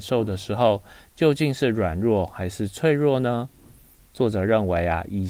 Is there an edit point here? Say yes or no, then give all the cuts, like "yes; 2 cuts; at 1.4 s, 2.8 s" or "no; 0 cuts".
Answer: no; 0 cuts